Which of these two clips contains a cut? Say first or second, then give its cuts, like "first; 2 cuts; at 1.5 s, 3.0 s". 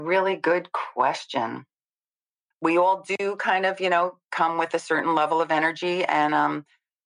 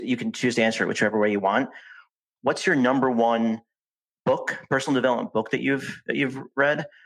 first; 1 cut; at 2.5 s